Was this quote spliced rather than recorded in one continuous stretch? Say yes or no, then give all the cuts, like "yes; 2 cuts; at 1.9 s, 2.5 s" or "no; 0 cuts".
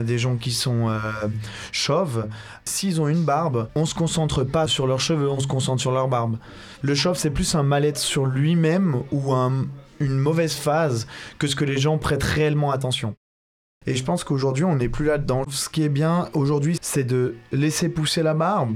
yes; 3 cuts; at 13.8 s, 15.4 s, 16.8 s